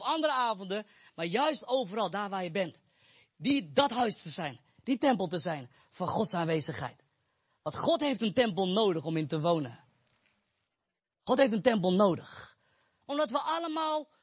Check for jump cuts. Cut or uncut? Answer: cut